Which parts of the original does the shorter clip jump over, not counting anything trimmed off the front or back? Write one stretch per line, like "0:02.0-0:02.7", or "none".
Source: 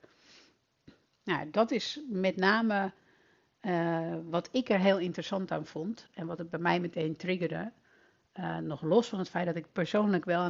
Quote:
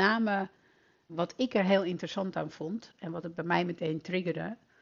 0:03.5-0:04.2